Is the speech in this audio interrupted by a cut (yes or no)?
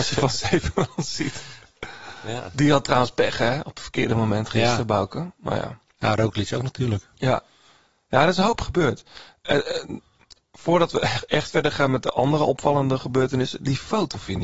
no